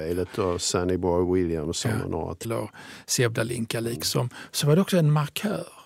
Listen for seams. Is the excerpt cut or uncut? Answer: cut